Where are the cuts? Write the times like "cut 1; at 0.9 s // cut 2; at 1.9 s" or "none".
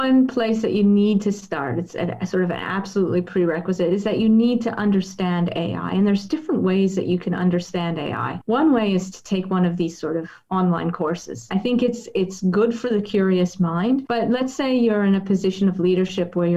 cut 1; at 11.5 s